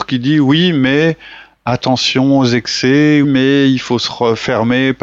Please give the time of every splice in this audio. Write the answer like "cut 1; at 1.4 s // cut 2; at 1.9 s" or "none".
cut 1; at 3.2 s